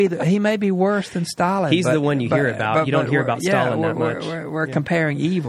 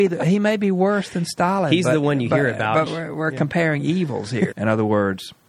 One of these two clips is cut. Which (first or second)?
second